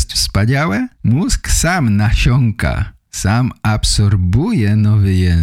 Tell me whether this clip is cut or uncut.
cut